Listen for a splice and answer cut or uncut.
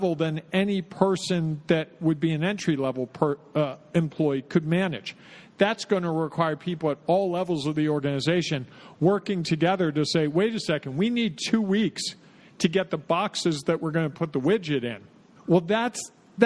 cut